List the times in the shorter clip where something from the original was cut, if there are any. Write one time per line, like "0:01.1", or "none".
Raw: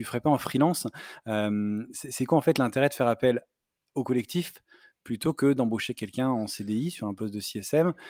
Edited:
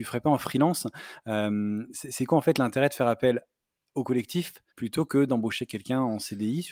0:04.7